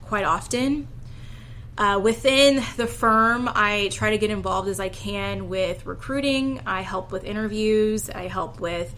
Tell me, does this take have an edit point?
no; 0 cuts

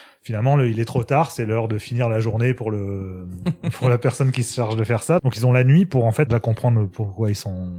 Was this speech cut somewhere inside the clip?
yes; 2 cuts; at 5.2 s, 6.3 s

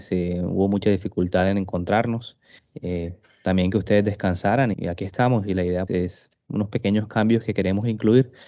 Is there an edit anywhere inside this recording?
yes; 3 cuts; at 2.6 s, 4.7 s, 5.9 s

